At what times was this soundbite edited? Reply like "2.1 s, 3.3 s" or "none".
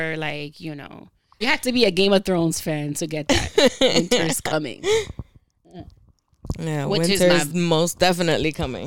1.4 s